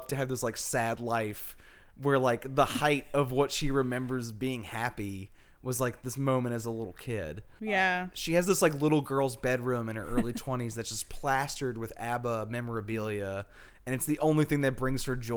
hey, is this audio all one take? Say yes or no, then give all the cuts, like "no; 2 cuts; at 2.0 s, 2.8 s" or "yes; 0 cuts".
yes; 0 cuts